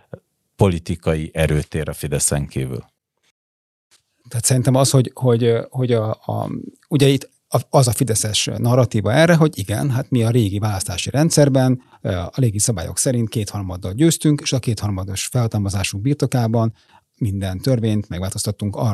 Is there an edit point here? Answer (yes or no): yes